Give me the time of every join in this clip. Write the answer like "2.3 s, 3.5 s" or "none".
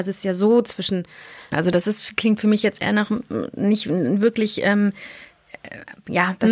1.5 s